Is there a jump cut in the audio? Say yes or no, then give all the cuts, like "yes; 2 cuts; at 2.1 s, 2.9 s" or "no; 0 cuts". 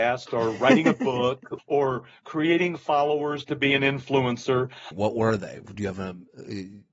yes; 2 cuts; at 1.6 s, 4.9 s